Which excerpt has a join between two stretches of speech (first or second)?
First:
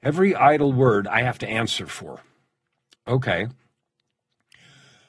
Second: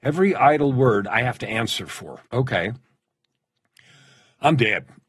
second